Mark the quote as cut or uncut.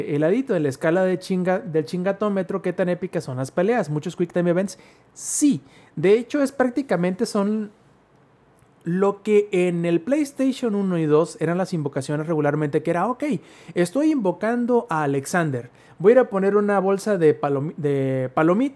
uncut